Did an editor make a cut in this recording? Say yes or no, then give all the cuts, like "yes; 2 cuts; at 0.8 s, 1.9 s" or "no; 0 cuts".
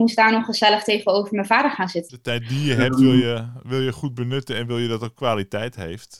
yes; 1 cut; at 2.1 s